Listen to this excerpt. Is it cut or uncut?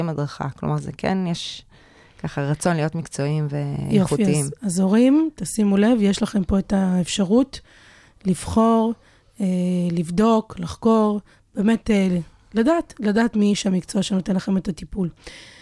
uncut